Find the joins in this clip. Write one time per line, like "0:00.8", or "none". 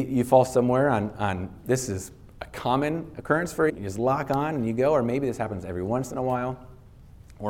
0:03.7